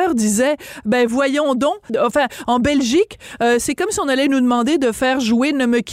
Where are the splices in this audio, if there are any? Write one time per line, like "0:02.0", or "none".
0:01.9